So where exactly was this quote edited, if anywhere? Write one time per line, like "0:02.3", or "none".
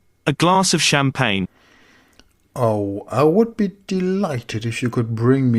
none